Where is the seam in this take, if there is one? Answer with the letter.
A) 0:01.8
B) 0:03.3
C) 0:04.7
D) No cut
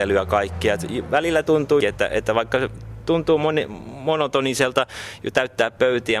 A